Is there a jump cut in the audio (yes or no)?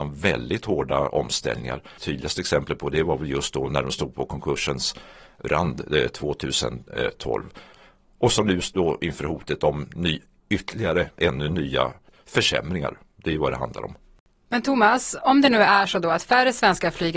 yes